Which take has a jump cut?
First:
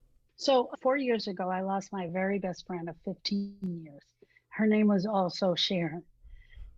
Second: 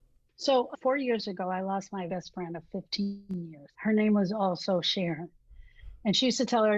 second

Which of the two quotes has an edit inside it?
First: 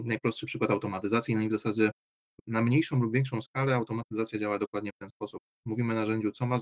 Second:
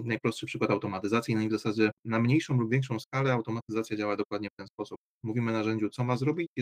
second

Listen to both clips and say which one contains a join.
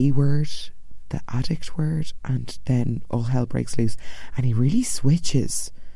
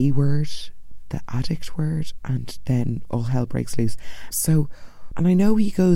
second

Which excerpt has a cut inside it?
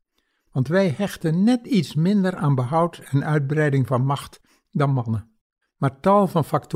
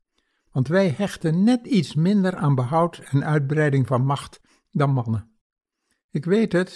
first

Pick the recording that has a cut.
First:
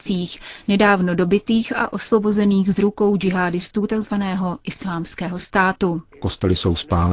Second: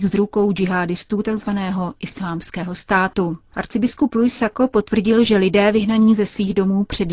first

